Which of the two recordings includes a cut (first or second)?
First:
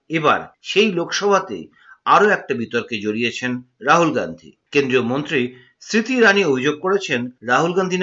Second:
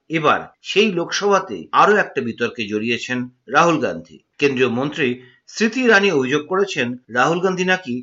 second